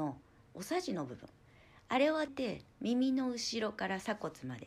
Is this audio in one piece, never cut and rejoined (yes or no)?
no